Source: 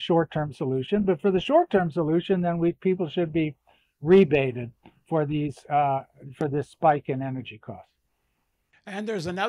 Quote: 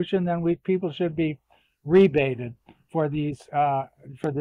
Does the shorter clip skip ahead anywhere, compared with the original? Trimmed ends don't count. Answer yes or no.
no